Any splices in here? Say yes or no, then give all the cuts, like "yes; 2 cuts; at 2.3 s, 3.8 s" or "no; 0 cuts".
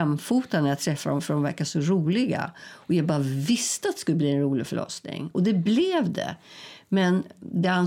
no; 0 cuts